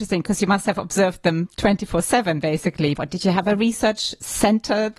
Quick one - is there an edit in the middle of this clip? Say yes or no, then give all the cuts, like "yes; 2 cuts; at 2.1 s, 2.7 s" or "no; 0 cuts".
yes; 1 cut; at 3.0 s